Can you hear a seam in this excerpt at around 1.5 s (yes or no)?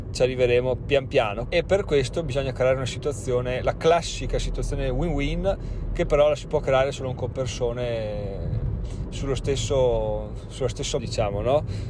yes